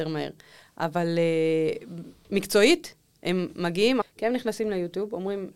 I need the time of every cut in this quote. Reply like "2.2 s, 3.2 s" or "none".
4.0 s

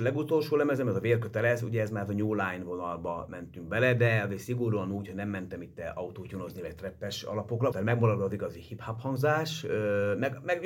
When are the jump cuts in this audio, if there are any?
7.7 s

